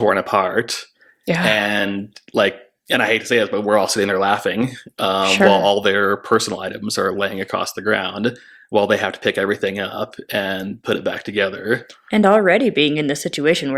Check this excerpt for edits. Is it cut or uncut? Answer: uncut